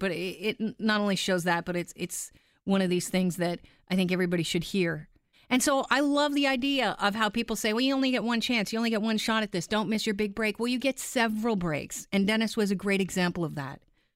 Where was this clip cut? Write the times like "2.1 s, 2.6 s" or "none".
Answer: 5.3 s